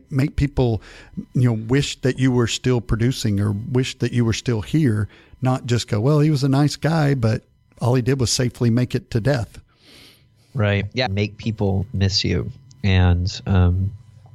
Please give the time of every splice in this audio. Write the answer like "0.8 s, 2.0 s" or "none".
11.1 s